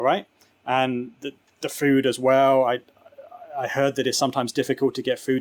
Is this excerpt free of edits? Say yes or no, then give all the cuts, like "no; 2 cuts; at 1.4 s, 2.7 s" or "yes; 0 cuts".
yes; 0 cuts